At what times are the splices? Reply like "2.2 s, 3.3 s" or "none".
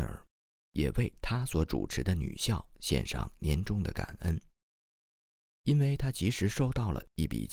none

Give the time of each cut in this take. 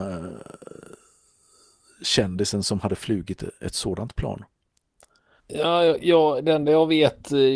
5.4 s

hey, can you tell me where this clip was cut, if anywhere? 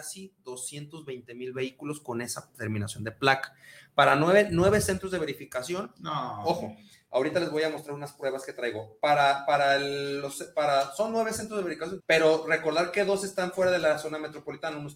12.0 s

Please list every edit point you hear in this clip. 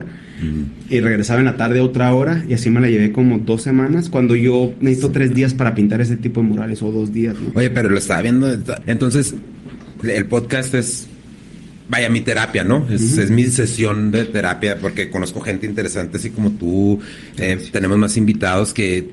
8.8 s, 10.0 s

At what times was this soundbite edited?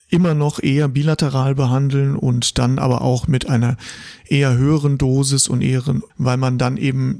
6.1 s

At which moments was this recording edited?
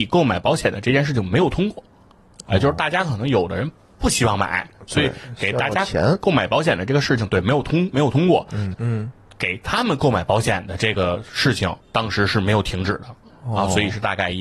8.7 s, 11.8 s, 13.3 s

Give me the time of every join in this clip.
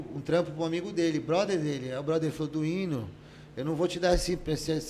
none

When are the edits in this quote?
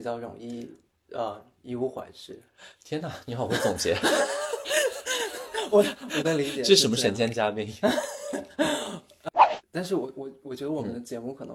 none

